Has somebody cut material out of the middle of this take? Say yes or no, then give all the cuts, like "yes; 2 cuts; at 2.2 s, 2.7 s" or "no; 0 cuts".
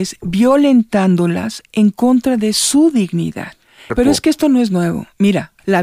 yes; 1 cut; at 3.9 s